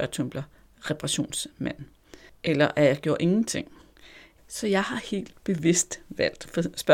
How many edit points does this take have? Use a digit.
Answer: 1